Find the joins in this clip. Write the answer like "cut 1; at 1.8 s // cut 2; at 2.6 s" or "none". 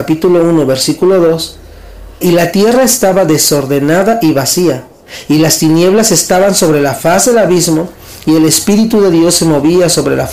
cut 1; at 2.2 s